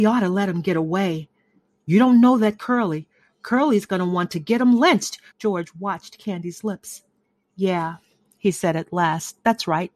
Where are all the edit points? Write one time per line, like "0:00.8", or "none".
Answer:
0:05.3